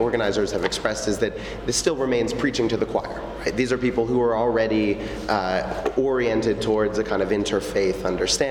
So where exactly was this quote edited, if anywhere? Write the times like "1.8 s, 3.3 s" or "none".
none